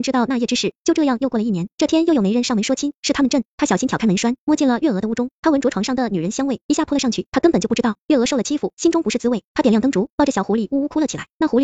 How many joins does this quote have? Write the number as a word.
three